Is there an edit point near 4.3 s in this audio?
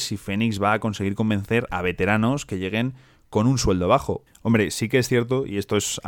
yes; 1 cut; at 4.3 s

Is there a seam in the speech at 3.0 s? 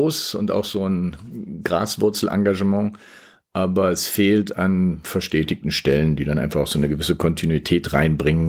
no; 0 cuts

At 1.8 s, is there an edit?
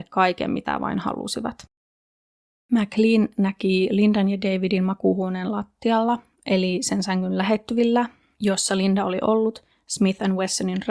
no; 0 cuts

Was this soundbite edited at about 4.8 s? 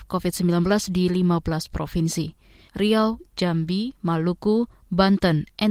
no; 1 cut; at 2.7 s

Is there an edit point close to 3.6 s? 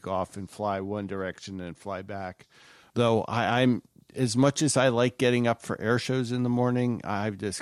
no; 0 cuts

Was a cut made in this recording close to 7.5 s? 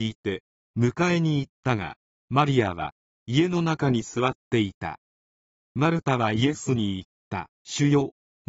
yes; 1 cut; at 7.5 s

